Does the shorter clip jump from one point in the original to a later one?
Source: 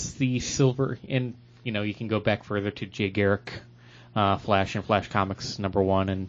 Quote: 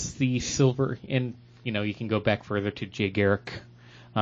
no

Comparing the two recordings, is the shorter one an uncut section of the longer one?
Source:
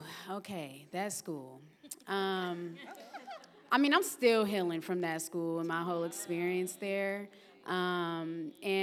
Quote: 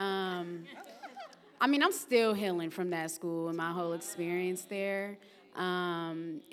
yes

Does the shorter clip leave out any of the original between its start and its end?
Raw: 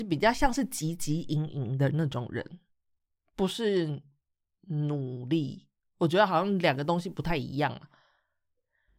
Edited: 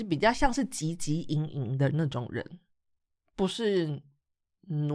no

